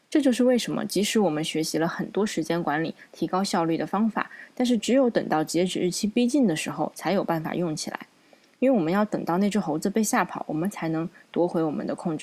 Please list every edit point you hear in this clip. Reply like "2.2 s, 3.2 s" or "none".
none